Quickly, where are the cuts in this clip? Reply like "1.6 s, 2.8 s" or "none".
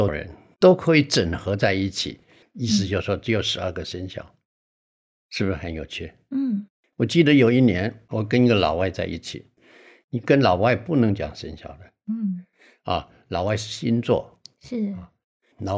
2.4 s